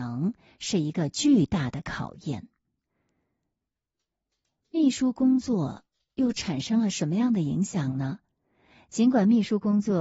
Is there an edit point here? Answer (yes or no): no